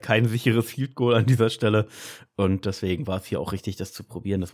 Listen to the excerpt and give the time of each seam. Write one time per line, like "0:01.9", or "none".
none